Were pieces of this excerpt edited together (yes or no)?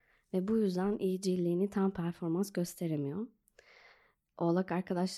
yes